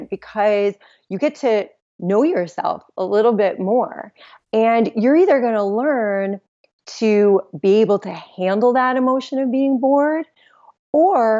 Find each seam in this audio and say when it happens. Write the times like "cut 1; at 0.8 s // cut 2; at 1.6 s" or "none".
none

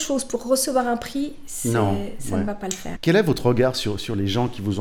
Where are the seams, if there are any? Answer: cut 1; at 3.0 s

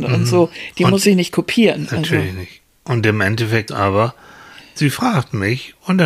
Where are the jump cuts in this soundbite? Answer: cut 1; at 3.7 s

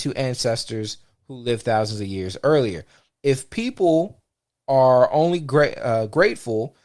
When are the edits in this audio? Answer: cut 1; at 3.1 s

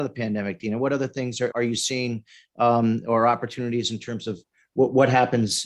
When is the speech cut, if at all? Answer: cut 1; at 1.5 s

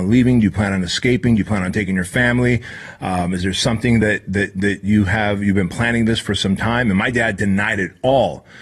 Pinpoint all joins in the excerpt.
none

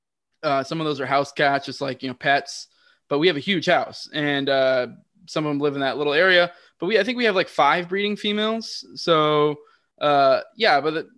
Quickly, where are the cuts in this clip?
none

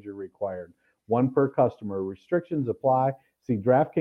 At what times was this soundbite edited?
none

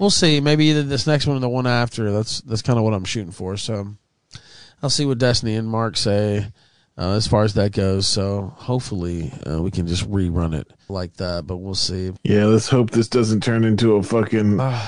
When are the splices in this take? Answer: cut 1; at 10.9 s // cut 2; at 12.2 s

